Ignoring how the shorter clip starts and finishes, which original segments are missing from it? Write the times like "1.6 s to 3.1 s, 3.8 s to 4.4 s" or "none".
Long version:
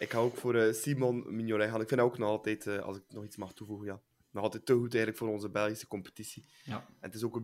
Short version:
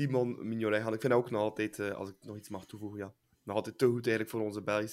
none